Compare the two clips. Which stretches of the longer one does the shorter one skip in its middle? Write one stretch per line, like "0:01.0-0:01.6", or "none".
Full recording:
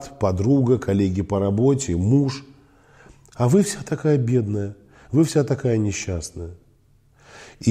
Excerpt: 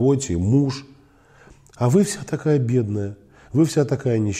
none